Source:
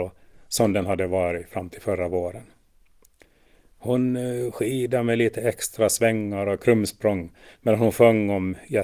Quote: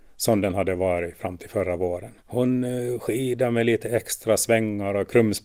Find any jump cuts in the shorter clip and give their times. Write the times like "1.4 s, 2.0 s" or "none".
2.2 s